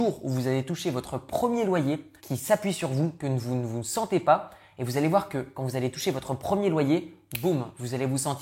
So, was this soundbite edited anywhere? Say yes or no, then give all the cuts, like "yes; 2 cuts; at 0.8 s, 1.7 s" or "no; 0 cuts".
yes; 1 cut; at 2.2 s